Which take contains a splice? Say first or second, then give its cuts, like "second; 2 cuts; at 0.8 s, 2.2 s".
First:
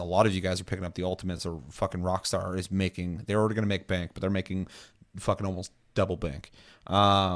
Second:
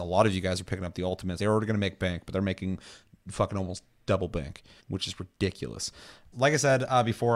second; 3 cuts; at 1.4 s, 4.8 s, 6.3 s